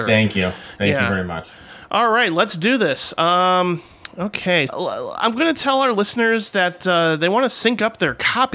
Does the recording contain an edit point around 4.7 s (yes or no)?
yes